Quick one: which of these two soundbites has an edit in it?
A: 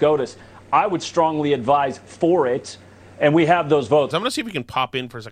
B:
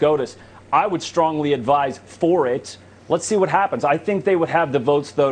A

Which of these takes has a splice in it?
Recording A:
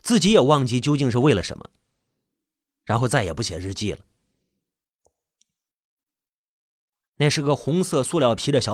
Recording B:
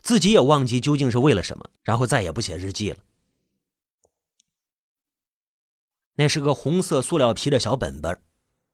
B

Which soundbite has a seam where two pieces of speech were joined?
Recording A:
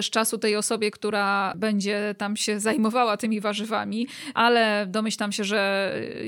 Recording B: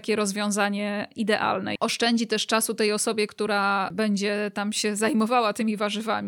B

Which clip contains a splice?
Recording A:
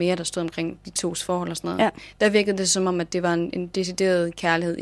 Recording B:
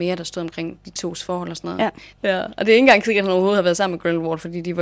B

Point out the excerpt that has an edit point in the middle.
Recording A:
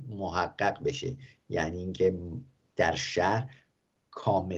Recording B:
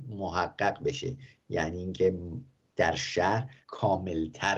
B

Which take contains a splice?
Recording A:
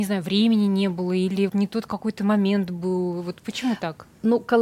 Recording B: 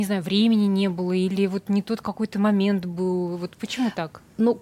A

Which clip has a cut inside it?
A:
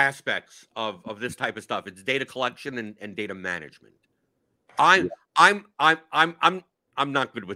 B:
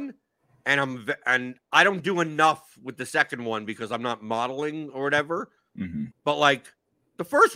B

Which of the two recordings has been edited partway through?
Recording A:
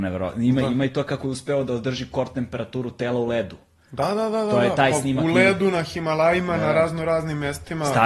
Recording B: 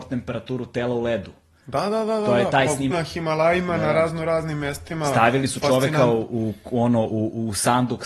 B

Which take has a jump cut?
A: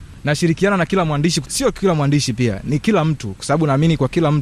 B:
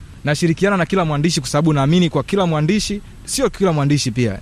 A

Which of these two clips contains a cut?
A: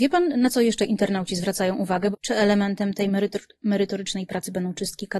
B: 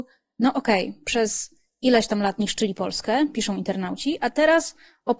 A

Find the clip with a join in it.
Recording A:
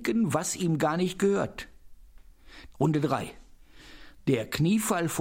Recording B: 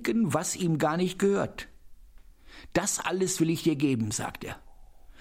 A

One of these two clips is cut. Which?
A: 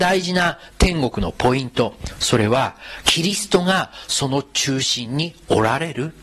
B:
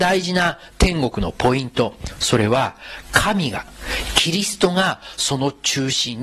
A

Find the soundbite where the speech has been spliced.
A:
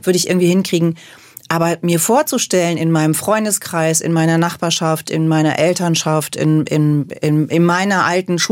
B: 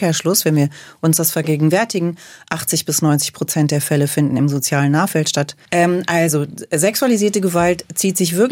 B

